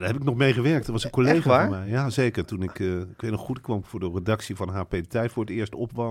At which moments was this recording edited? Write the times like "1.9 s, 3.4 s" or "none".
none